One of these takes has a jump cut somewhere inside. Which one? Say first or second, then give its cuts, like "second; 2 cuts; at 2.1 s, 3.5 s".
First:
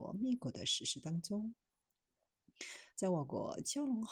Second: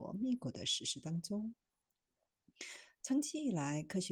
first; 1 cut; at 2.9 s